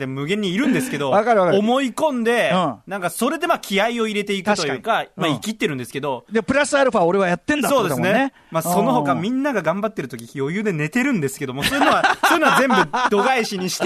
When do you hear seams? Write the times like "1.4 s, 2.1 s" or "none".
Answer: none